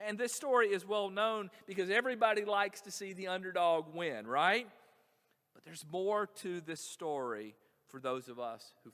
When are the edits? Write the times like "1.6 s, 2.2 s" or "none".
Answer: none